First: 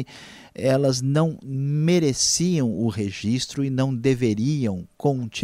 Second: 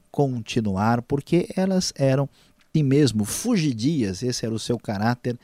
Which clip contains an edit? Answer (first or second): second